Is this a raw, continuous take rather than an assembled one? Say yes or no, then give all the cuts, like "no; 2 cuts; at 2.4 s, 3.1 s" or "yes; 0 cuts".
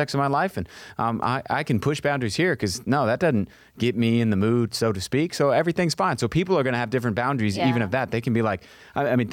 yes; 0 cuts